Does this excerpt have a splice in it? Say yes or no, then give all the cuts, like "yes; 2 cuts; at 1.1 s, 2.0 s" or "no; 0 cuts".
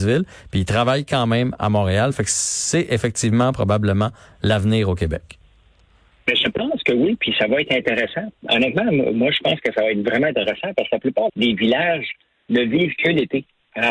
yes; 1 cut; at 11.3 s